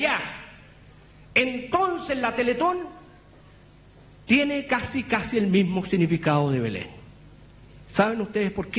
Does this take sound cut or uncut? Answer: uncut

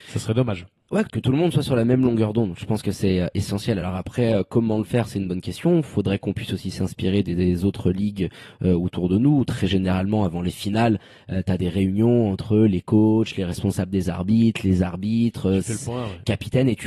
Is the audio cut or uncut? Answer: uncut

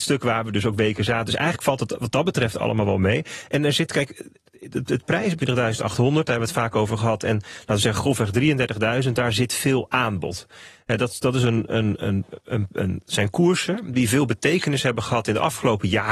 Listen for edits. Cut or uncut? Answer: cut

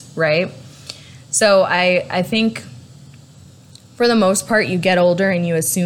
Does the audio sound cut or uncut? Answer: uncut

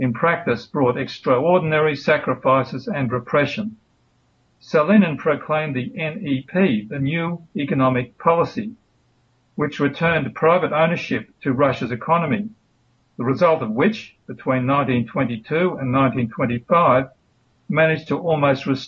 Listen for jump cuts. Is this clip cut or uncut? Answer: cut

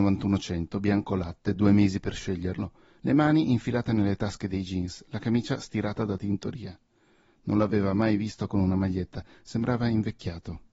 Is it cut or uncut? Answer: uncut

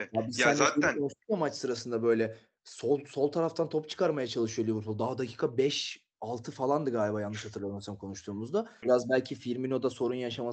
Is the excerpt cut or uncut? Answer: cut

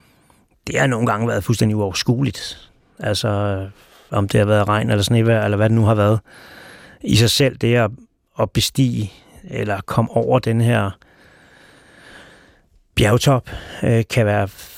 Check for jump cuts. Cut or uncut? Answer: uncut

